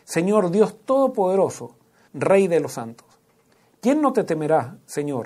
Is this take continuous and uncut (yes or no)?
no